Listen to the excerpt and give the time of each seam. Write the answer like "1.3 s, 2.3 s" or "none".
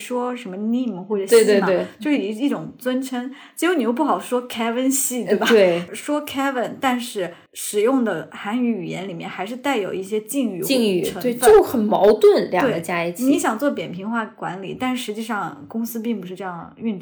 none